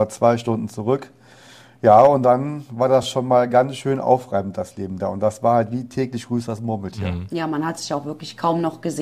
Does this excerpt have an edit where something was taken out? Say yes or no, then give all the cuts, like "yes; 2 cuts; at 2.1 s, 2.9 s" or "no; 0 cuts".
no; 0 cuts